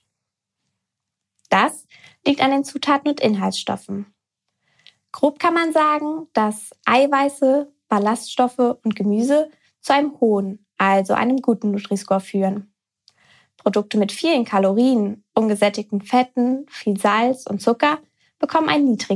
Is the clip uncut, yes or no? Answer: yes